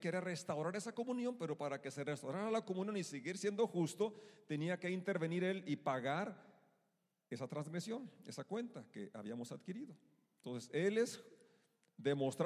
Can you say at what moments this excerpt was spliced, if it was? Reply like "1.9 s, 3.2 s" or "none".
none